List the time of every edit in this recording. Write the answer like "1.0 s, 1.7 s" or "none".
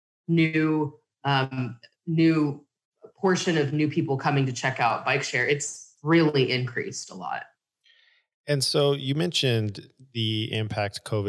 none